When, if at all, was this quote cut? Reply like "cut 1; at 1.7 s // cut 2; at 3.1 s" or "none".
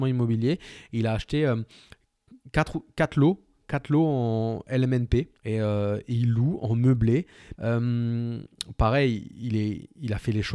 cut 1; at 5.4 s // cut 2; at 7.6 s